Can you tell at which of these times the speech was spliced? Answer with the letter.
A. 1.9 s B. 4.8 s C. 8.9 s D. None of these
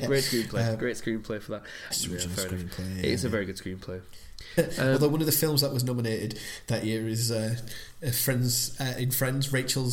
A